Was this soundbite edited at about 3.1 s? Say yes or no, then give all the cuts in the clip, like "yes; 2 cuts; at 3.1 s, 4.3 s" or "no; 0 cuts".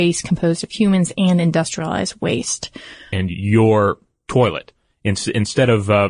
yes; 1 cut; at 3.1 s